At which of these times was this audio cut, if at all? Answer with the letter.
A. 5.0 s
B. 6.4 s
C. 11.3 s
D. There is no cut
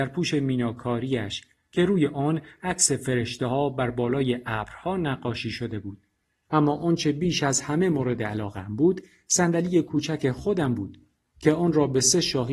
B